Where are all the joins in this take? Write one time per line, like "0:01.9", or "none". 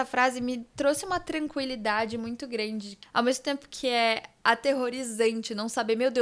0:03.0